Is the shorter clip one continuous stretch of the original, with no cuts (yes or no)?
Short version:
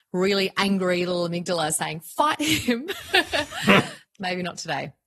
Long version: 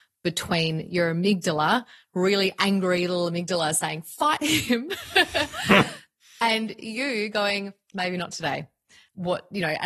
no